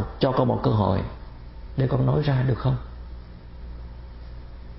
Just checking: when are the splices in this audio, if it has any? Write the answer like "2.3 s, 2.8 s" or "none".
none